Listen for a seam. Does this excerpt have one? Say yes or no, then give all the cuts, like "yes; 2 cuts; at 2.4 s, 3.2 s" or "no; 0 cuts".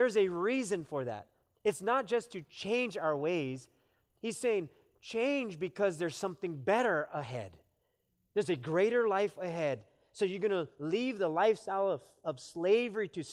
no; 0 cuts